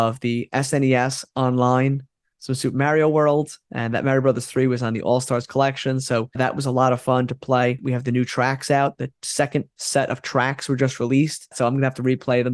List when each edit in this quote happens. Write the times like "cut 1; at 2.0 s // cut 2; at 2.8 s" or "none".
cut 1; at 2.3 s // cut 2; at 7.8 s // cut 3; at 11.5 s